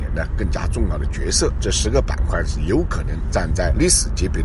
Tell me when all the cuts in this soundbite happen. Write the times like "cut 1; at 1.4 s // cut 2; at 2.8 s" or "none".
cut 1; at 1.6 s